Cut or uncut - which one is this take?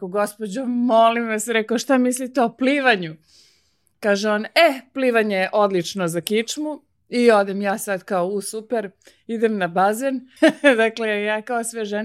cut